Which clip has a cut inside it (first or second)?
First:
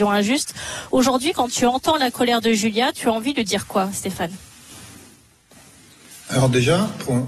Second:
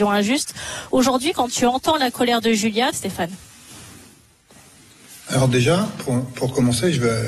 second